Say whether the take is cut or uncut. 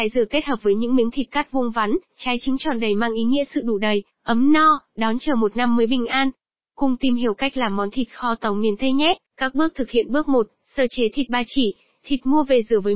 cut